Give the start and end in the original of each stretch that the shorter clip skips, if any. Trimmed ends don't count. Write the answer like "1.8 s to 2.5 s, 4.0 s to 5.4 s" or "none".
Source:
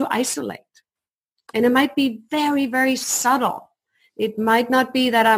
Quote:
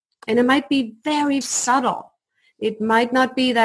2.7 s to 3.0 s